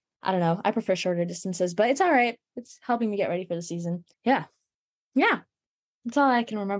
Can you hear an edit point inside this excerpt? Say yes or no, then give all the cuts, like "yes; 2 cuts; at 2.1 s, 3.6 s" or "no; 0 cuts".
yes; 1 cut; at 4.1 s